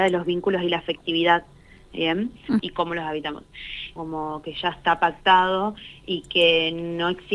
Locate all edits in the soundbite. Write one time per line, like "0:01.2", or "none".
0:02.6
0:04.0